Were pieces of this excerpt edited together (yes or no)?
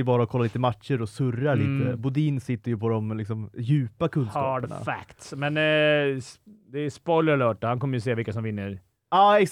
no